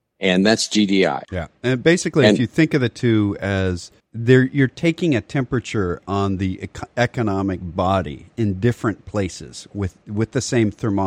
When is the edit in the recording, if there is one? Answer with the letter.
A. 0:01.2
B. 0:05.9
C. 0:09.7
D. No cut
A